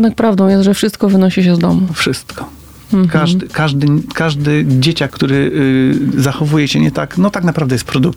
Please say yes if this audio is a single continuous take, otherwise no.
no